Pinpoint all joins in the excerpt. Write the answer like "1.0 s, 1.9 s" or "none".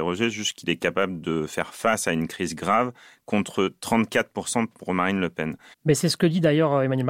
5.7 s